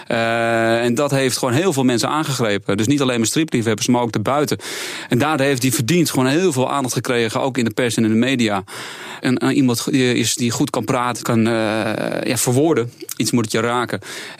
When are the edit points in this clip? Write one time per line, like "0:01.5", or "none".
0:09.2
0:11.2
0:13.2